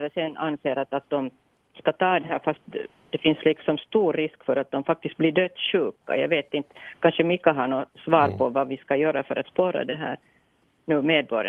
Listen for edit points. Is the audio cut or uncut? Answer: cut